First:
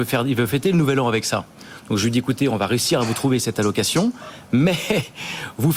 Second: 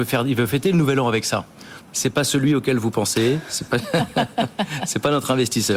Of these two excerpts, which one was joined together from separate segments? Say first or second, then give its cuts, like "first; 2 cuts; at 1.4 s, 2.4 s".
second; 1 cut; at 1.8 s